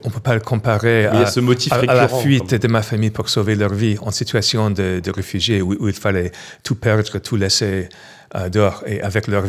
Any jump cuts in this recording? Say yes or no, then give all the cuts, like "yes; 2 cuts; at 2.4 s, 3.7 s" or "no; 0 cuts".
no; 0 cuts